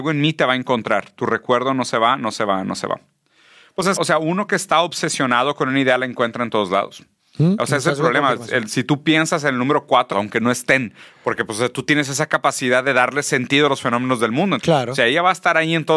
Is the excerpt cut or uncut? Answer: cut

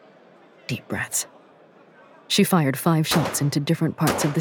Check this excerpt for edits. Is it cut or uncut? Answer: uncut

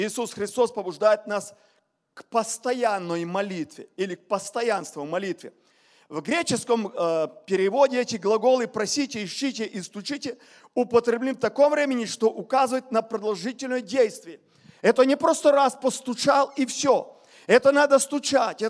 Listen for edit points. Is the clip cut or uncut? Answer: uncut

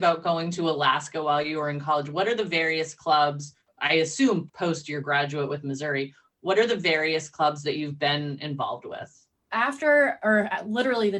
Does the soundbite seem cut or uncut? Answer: cut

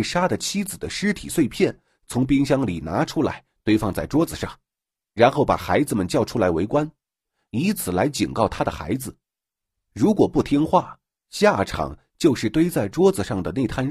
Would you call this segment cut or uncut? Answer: uncut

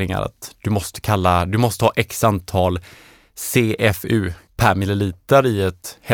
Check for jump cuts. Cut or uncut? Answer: cut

